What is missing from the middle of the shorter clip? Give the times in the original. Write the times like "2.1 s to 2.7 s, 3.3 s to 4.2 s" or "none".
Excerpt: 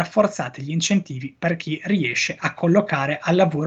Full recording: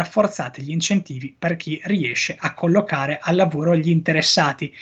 none